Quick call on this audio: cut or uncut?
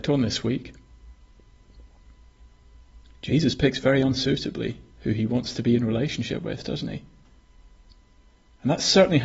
uncut